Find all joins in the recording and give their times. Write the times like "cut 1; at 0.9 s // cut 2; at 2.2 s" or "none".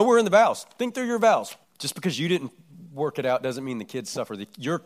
cut 1; at 1.6 s